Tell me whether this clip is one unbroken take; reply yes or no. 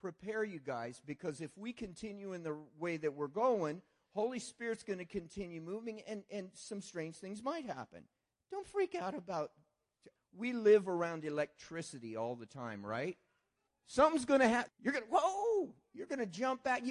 no